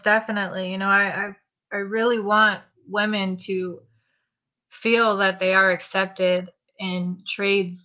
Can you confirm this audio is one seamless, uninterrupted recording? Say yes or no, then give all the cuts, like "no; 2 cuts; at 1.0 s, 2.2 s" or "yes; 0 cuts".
yes; 0 cuts